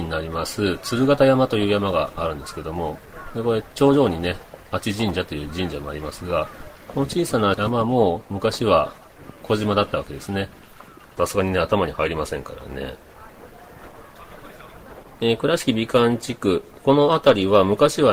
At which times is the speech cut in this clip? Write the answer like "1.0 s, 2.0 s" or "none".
11.2 s